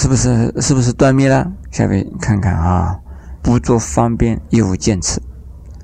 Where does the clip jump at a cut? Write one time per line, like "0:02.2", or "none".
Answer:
0:01.6
0:03.4
0:04.5